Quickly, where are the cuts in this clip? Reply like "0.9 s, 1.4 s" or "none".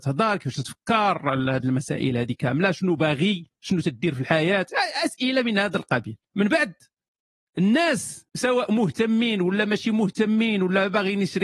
6.2 s, 8.3 s